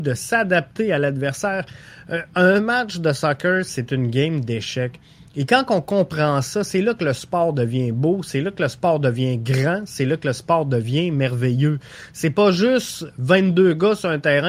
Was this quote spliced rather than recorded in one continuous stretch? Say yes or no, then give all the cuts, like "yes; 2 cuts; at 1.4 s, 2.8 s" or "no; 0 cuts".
no; 0 cuts